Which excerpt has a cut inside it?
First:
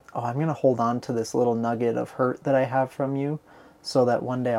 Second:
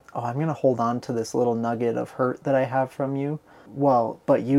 second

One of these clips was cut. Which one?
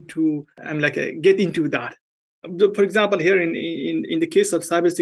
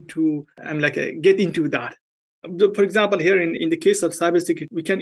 second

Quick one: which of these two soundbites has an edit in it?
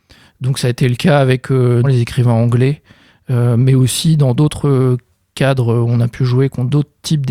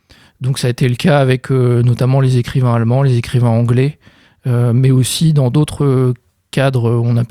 first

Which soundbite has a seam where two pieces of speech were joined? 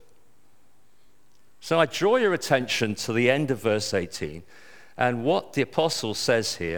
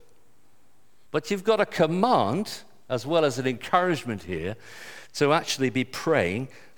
second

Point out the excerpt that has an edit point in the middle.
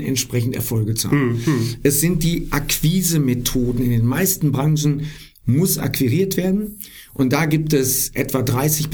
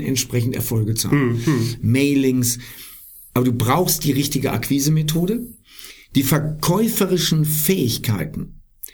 second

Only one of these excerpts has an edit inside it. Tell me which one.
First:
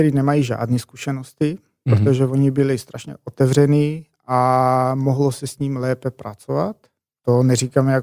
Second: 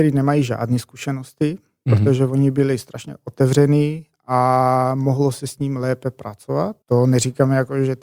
second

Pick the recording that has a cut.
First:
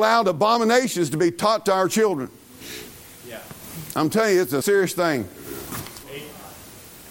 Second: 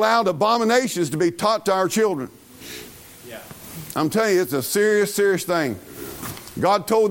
first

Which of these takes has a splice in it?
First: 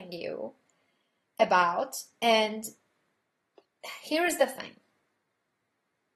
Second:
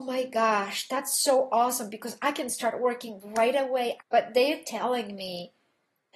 second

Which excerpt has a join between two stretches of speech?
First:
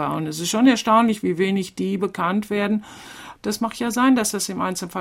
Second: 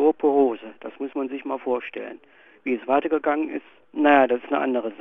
first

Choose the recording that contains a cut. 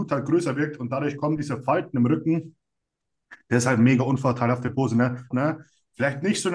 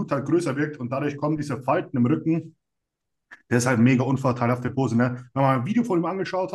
first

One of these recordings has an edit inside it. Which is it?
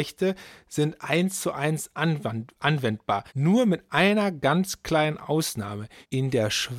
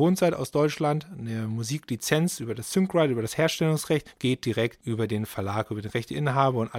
first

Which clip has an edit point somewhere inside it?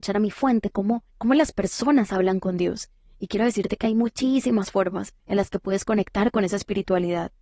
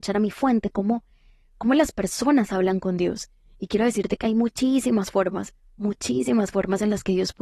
first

